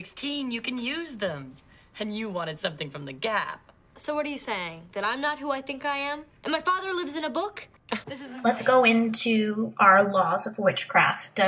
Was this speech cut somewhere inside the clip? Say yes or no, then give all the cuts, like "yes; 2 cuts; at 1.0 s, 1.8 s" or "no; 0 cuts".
yes; 2 cuts; at 6.3 s, 8.0 s